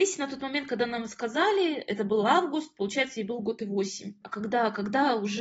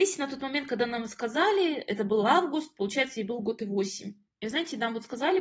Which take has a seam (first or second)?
first